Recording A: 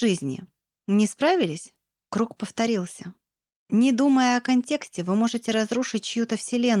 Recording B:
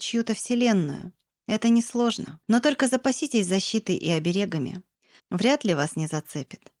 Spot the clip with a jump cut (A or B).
B